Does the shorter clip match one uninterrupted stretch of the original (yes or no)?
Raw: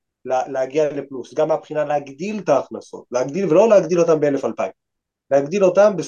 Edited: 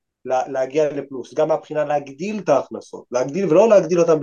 yes